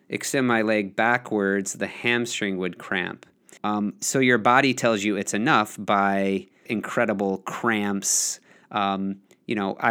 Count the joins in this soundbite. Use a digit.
2